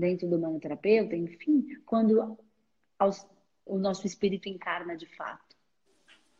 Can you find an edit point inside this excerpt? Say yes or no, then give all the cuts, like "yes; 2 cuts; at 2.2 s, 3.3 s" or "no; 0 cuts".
yes; 1 cut; at 3.7 s